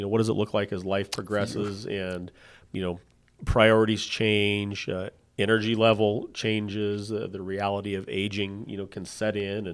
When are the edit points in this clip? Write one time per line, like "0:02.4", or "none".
none